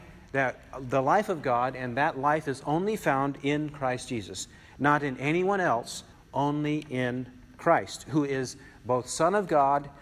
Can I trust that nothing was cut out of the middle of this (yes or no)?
no